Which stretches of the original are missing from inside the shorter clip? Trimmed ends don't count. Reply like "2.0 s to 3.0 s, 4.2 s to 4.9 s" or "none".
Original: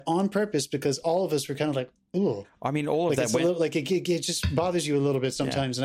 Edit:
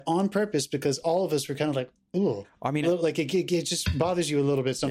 2.8 s to 3.4 s